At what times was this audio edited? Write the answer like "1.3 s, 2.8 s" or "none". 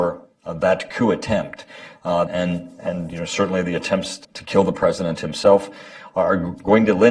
2.3 s, 4.2 s